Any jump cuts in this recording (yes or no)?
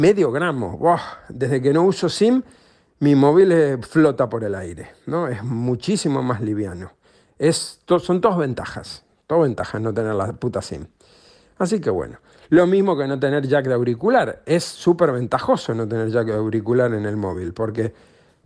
no